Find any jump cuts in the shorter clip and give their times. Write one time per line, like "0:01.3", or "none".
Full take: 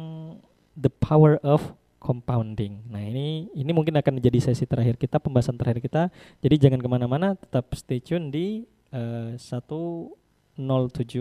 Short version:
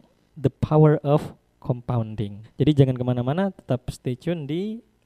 0:02.4